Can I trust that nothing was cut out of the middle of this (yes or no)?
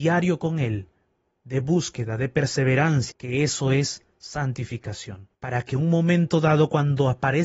no